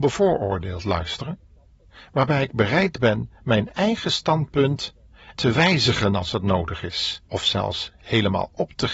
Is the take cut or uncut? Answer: cut